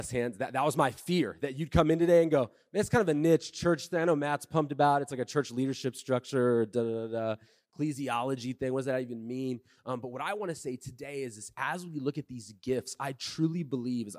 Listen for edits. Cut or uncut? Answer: uncut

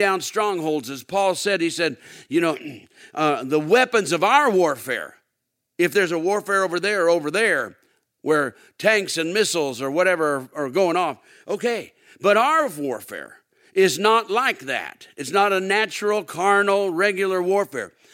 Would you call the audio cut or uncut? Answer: uncut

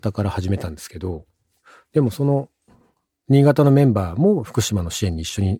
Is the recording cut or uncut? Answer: uncut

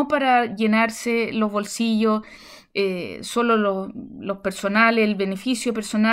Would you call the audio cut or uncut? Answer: uncut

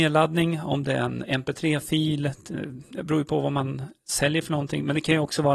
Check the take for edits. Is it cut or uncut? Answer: uncut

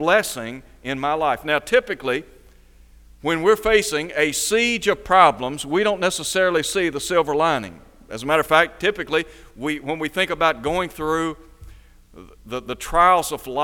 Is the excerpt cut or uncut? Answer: uncut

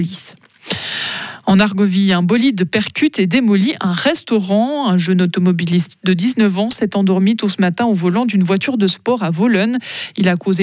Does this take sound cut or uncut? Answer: uncut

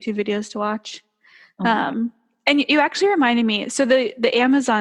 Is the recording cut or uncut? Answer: uncut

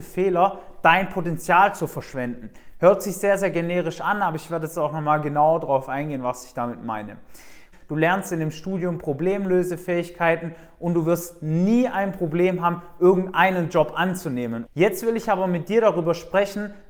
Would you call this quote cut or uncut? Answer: cut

